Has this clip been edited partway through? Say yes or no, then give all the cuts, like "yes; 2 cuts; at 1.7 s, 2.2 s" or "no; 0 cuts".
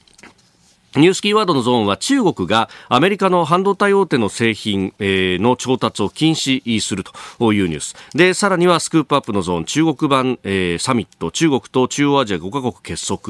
no; 0 cuts